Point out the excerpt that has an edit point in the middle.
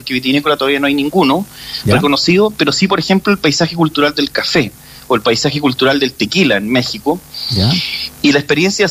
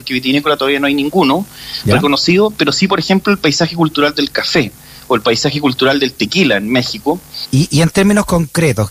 second; 1 cut; at 7.4 s

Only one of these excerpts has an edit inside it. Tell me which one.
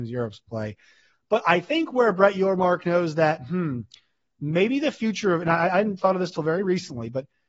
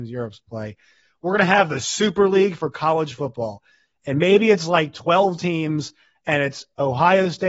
first; 1 cut; at 1.1 s

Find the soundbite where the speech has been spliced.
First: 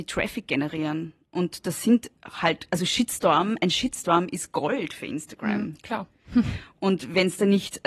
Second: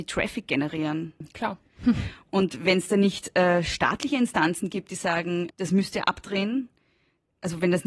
second; 2 cuts; at 1.2 s, 5.5 s

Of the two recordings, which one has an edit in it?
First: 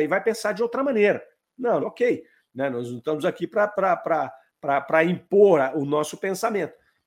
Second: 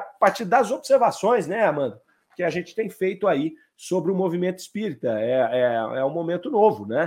first; 1 cut; at 1.8 s

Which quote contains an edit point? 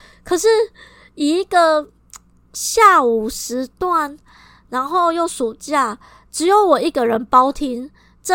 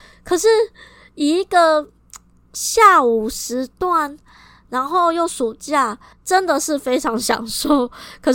second; 1 cut; at 6.1 s

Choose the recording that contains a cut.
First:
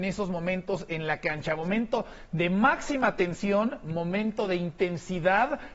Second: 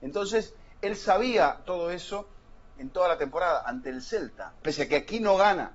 second; 2 cuts; at 2.8 s, 4.6 s

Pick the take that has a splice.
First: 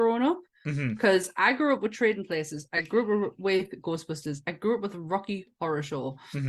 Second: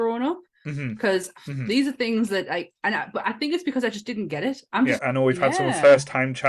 second; 2 cuts; at 1.4 s, 5.0 s

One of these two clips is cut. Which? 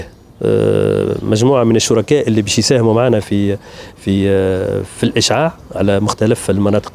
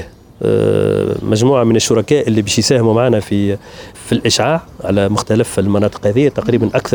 second; 1 cut; at 3.9 s

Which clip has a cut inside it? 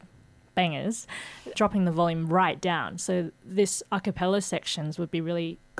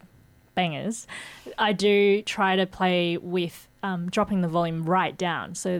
first; 1 cut; at 1.5 s

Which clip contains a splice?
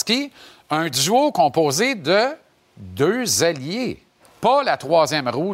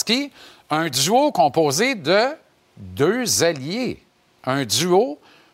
first; 1 cut; at 4.2 s

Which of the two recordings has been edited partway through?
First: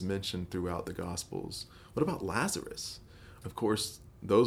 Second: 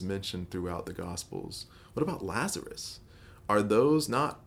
first; 1 cut; at 3.4 s

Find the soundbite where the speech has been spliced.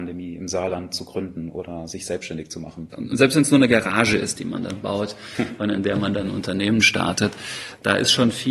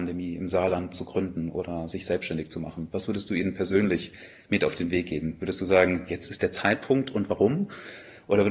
first; 1 cut; at 2.9 s

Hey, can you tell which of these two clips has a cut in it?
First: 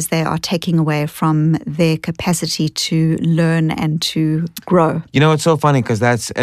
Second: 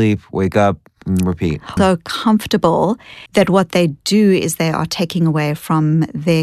second; 2 cuts; at 1.8 s, 3.3 s

